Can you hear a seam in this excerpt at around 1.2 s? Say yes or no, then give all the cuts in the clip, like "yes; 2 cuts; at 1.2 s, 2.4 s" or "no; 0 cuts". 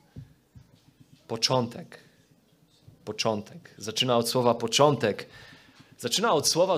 no; 0 cuts